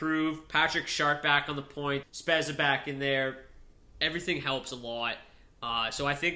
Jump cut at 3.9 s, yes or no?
no